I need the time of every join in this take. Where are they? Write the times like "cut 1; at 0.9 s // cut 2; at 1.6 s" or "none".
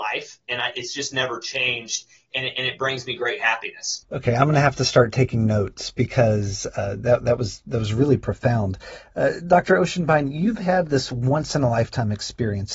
none